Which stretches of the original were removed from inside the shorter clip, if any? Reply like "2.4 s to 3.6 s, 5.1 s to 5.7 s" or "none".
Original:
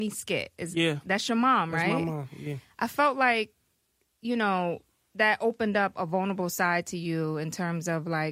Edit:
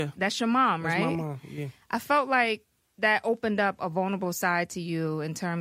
3.7 s to 5.0 s